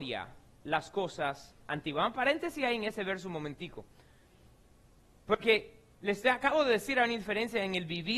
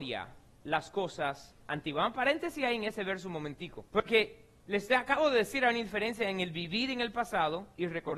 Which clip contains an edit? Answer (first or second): second